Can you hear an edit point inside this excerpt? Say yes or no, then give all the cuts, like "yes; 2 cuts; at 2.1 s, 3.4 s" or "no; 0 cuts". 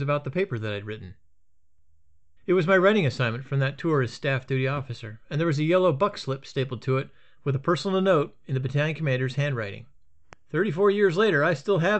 yes; 1 cut; at 2.4 s